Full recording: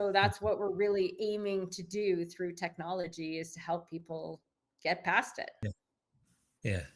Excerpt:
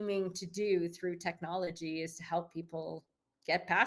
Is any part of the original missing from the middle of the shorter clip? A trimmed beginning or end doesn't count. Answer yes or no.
no